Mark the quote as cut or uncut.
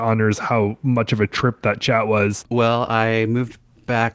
cut